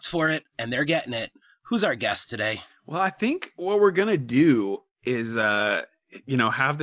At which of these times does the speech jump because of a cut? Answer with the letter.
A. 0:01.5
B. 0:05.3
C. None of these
C